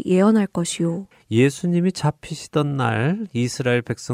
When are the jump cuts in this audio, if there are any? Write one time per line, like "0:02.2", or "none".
0:01.1